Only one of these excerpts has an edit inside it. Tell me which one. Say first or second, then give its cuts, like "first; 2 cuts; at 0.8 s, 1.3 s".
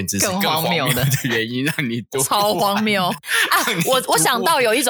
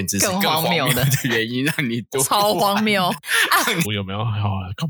second; 1 cut; at 3.8 s